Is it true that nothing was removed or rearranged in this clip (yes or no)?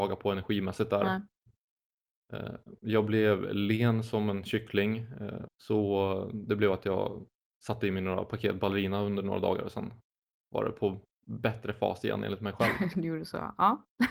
no